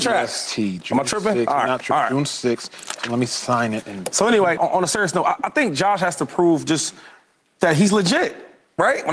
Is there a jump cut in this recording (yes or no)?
yes